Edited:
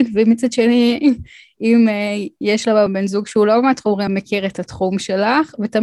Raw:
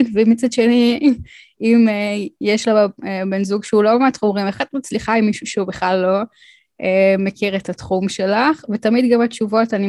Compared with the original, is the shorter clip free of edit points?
no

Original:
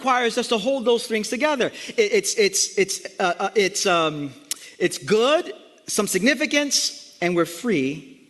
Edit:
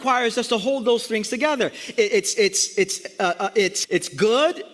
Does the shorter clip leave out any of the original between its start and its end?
yes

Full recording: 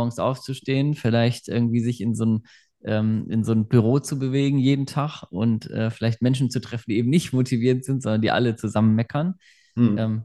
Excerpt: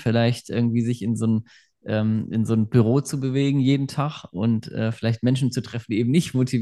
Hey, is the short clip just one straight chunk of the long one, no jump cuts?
yes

